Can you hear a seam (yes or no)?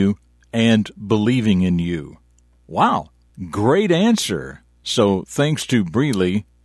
no